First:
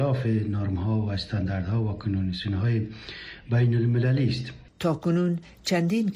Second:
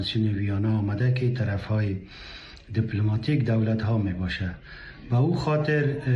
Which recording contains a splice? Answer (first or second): first